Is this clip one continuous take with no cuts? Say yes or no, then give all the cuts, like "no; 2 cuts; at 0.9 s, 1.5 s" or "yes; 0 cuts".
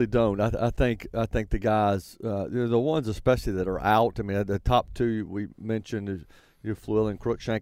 yes; 0 cuts